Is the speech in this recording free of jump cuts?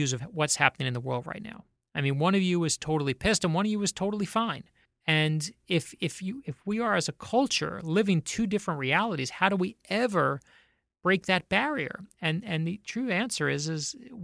yes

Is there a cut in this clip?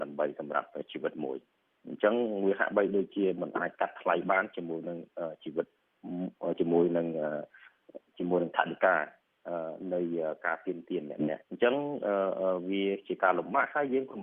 yes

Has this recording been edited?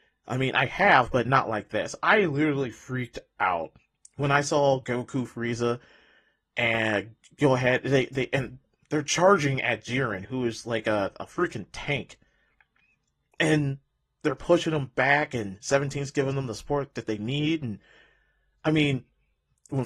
no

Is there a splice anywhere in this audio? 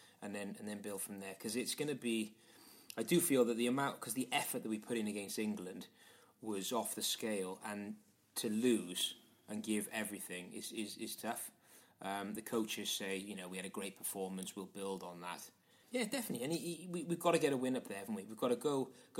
yes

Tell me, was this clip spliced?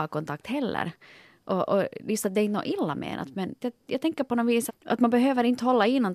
yes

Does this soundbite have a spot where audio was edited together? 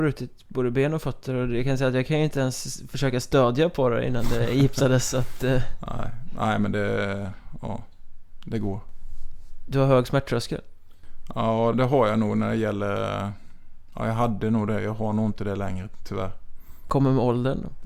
yes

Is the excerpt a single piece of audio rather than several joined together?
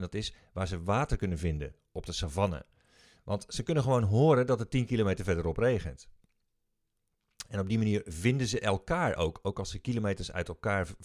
yes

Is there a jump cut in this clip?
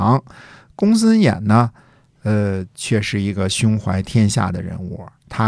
no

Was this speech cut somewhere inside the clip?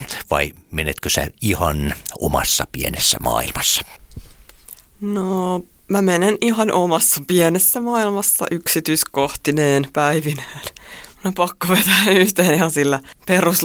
yes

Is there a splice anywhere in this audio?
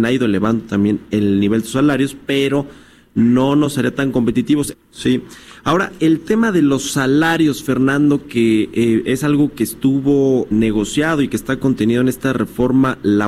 yes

